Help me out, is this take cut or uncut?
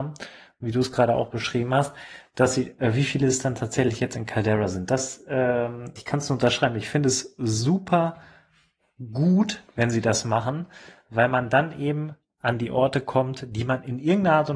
cut